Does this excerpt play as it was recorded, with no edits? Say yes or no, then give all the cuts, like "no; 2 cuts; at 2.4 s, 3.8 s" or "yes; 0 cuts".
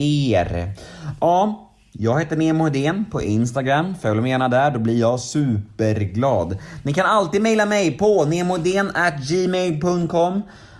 yes; 0 cuts